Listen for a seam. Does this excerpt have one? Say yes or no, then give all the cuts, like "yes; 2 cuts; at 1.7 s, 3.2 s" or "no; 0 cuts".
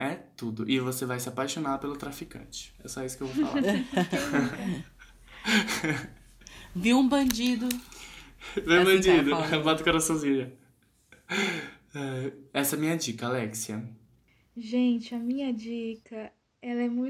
no; 0 cuts